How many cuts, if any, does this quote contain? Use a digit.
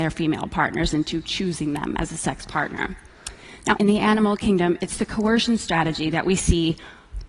1